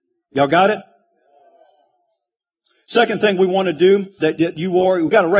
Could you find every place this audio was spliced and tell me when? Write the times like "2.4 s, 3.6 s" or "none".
4.2 s